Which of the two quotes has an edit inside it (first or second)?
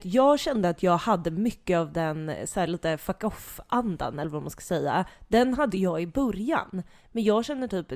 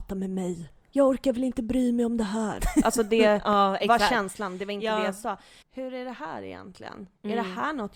second